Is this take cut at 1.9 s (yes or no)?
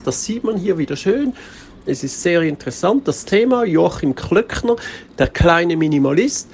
yes